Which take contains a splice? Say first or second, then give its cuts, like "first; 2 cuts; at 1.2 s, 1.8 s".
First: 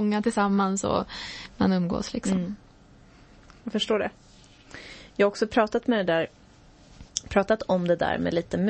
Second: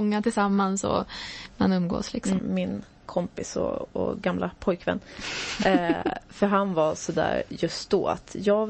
second; 1 cut; at 2.4 s